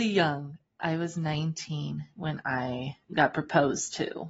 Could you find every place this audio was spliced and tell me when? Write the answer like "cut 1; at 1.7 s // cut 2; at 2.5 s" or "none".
cut 1; at 3.0 s